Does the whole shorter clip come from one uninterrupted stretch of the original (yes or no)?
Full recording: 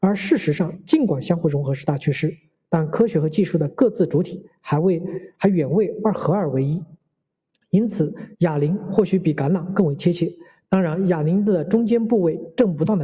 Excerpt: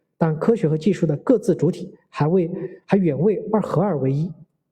yes